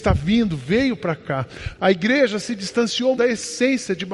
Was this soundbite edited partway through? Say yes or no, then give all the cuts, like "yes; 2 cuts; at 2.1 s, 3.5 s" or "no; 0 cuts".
yes; 2 cuts; at 1.8 s, 3.2 s